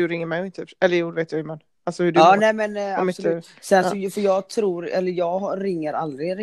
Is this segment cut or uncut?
uncut